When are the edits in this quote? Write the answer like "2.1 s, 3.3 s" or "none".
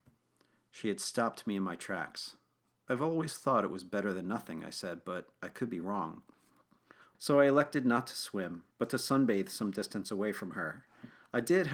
7.1 s, 8.7 s